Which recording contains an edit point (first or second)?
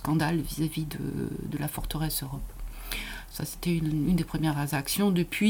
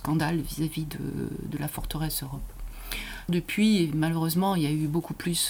second